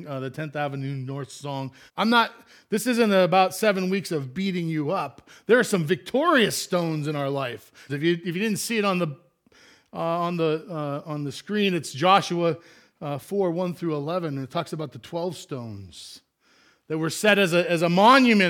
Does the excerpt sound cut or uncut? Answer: cut